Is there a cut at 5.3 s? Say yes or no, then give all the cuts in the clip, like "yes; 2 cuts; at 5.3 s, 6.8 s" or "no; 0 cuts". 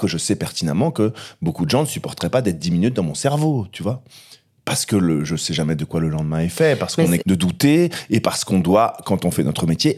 no; 1 cut; at 7.2 s